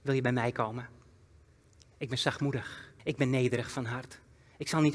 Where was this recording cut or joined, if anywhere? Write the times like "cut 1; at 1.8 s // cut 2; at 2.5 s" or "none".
cut 1; at 3.0 s